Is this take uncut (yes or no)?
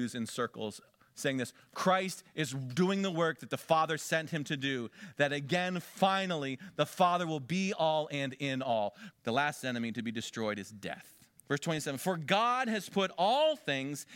no